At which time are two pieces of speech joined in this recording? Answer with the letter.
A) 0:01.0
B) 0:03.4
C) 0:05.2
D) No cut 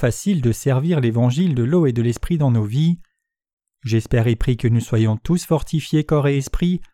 D